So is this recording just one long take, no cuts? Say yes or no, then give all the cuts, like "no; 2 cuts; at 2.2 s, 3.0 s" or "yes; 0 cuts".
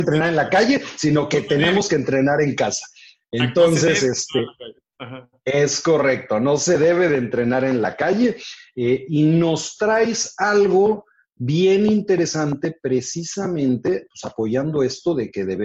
yes; 0 cuts